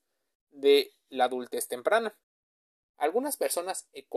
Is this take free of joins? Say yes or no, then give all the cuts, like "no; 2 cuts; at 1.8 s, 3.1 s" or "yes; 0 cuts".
no; 1 cut; at 2.8 s